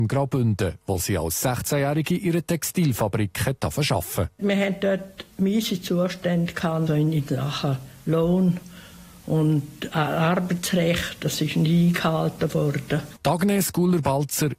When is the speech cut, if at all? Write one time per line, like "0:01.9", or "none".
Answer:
0:06.9
0:13.2